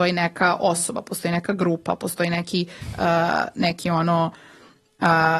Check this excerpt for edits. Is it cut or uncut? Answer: uncut